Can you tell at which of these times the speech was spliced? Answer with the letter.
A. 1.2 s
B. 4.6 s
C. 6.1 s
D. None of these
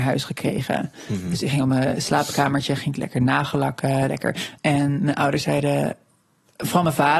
B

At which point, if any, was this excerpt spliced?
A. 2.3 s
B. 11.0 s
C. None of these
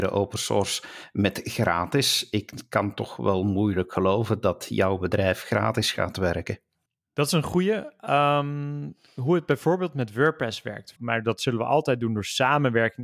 B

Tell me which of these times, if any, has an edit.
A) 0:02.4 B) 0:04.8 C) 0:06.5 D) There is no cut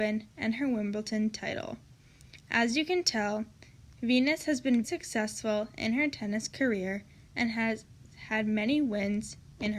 B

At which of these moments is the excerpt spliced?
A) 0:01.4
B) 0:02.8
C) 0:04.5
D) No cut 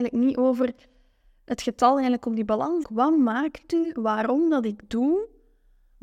B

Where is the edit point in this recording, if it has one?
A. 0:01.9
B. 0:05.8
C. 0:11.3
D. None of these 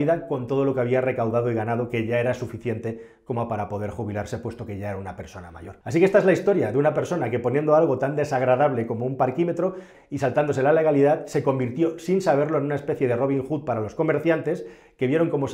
B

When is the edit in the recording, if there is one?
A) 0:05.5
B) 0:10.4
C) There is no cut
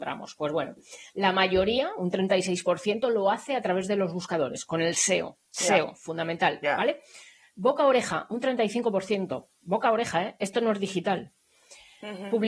A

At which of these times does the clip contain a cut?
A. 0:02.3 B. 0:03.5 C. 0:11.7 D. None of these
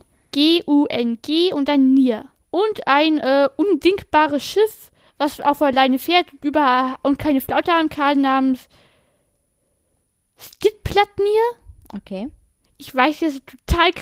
A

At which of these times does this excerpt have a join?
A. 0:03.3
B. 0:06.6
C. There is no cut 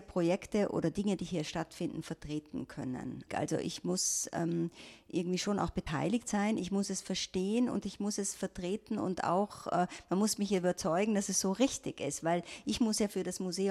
A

